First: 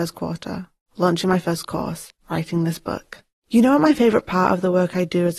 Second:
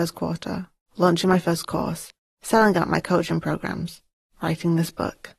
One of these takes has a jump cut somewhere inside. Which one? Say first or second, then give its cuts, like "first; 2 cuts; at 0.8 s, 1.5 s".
first; 2 cuts; at 2.2 s, 3.3 s